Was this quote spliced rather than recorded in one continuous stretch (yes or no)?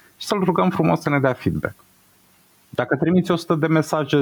no